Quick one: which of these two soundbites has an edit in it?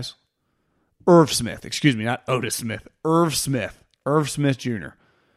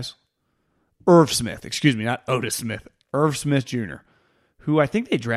second; 1 cut; at 3.0 s

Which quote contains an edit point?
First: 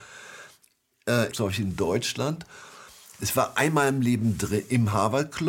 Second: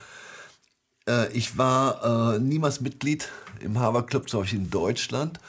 first; 1 cut; at 1.3 s

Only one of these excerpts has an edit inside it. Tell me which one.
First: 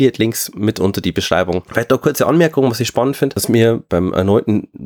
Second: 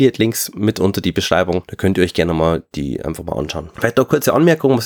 first; 1 cut; at 1.7 s

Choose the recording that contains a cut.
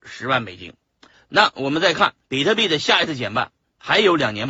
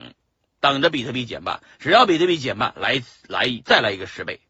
first; 2 cuts; at 1.1 s, 2.2 s

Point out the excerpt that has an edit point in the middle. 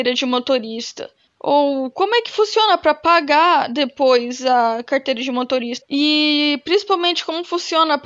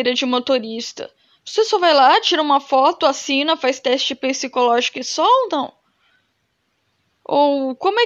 first; 2 cuts; at 1.3 s, 5.8 s

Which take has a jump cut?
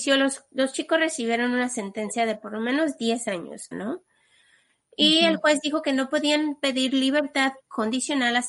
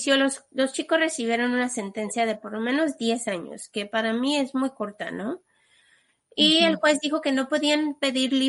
first; 1 cut; at 3.7 s

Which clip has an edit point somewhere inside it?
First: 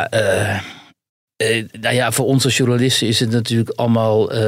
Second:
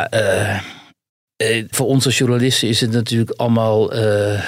second; 1 cut; at 1.7 s

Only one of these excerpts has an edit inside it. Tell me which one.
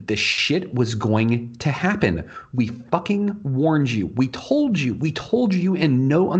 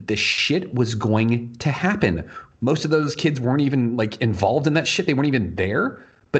second; 1 cut; at 2.5 s

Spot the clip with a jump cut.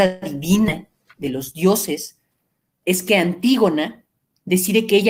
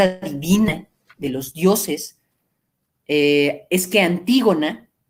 first; 1 cut; at 2.8 s

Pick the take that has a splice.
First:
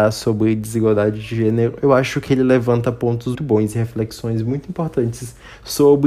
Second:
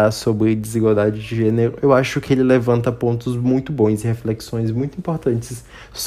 first; 1 cut; at 3.3 s

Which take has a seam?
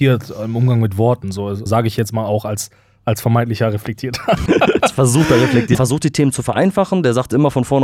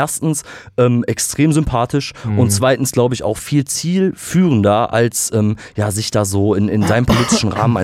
first; 3 cuts; at 1.7 s, 4.5 s, 5.7 s

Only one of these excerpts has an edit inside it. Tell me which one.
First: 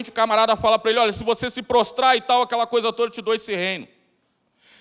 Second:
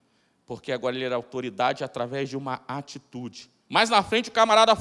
second; 1 cut; at 3.6 s

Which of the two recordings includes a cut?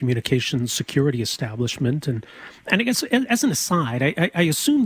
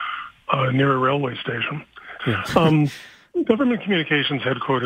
second; 1 cut; at 2.2 s

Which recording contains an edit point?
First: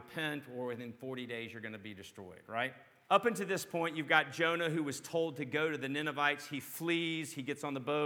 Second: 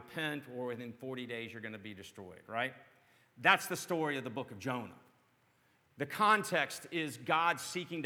first; 1 cut; at 3.0 s

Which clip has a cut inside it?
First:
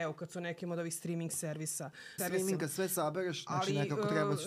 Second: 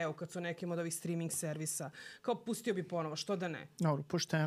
first; 2 cuts; at 2.2 s, 3.5 s

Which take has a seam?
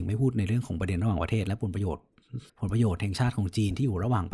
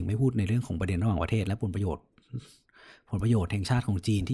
first; 1 cut; at 2.5 s

